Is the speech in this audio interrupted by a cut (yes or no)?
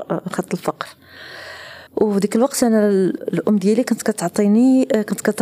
yes